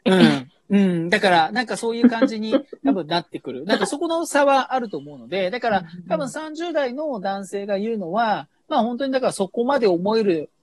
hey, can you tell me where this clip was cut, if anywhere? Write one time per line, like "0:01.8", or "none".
none